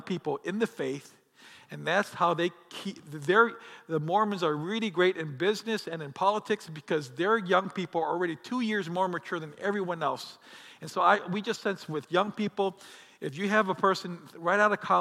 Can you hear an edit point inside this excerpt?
no; 0 cuts

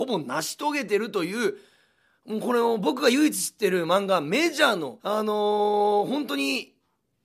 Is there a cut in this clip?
yes; 1 cut; at 5.0 s

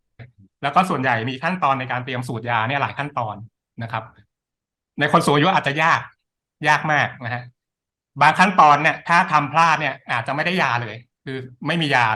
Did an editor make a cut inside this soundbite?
no; 0 cuts

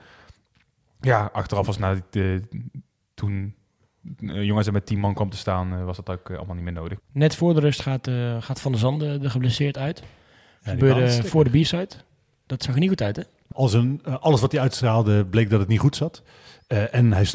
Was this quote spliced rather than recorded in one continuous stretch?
yes; 2 cuts; at 7.0 s, 13.5 s

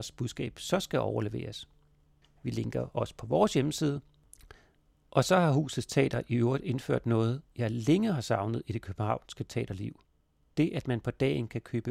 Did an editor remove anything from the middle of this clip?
yes; 1 cut; at 2.2 s

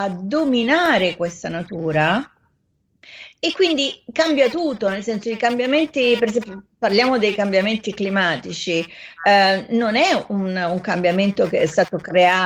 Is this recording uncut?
yes; 0 cuts

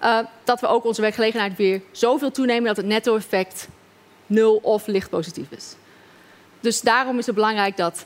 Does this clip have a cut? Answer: no; 0 cuts

